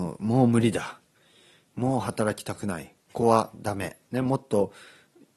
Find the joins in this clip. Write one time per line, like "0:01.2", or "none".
0:03.1